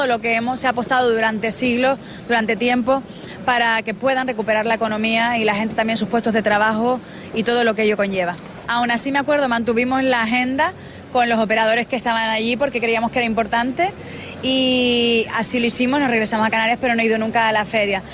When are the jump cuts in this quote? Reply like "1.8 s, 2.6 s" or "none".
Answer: 8.6 s